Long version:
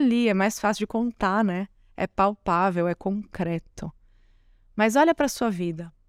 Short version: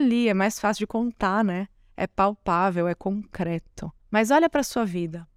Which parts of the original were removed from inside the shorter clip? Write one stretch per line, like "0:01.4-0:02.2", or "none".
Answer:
0:04.0-0:04.6